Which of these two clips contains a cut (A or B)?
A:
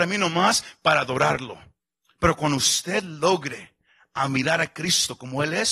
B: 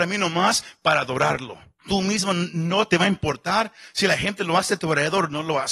B